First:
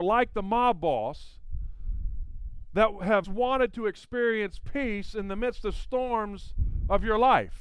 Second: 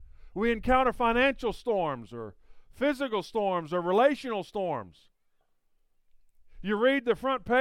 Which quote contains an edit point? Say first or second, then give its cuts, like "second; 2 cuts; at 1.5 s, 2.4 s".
first; 1 cut; at 3.2 s